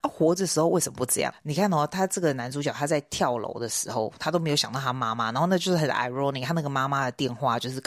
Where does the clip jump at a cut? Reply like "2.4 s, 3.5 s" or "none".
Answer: 1.3 s

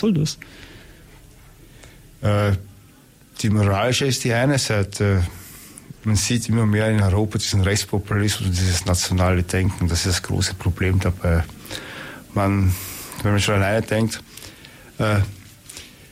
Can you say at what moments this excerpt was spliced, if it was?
5.9 s

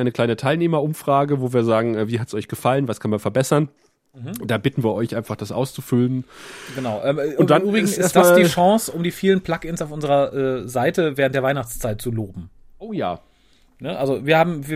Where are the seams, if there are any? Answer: none

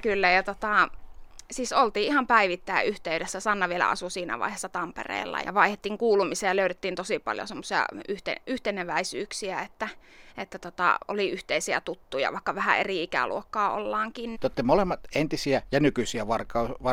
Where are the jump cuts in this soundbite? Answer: 5.4 s, 14.3 s

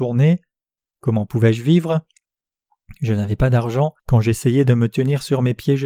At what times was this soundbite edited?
4.0 s

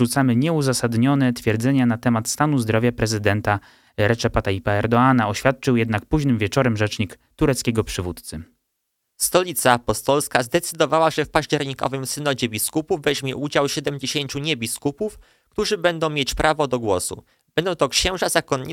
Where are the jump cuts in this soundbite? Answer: none

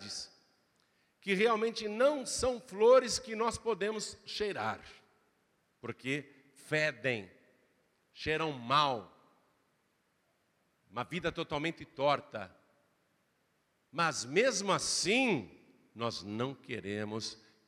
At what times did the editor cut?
none

